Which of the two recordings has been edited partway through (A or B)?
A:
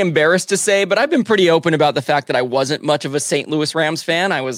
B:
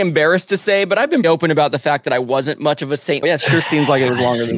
B